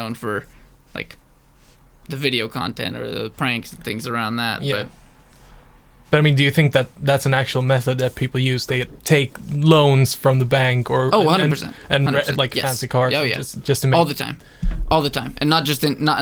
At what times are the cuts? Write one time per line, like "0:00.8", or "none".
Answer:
0:12.3